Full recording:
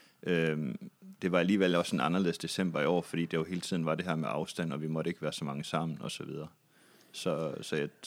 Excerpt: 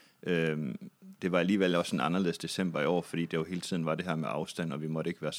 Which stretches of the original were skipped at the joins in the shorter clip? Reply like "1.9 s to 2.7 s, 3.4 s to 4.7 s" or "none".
none